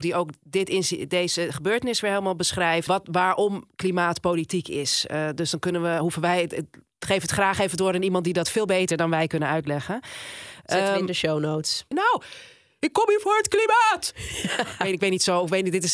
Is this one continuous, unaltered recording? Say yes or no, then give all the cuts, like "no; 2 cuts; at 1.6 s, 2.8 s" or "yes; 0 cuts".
no; 2 cuts; at 2.9 s, 11.9 s